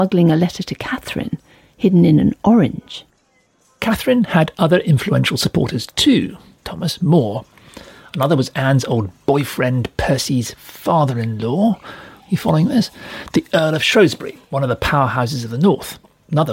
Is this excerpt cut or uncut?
cut